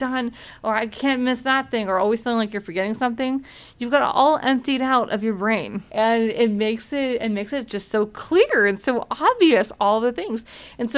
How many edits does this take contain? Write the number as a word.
one